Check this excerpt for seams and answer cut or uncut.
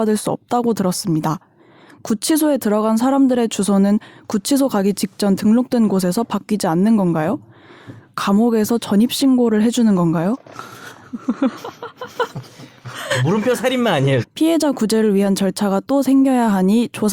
cut